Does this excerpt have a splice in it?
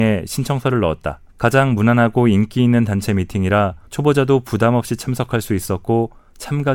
yes; 2 cuts; at 1.3 s, 3.9 s

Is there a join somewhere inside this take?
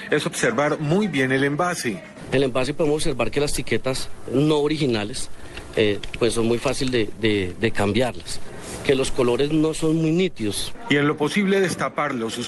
no; 0 cuts

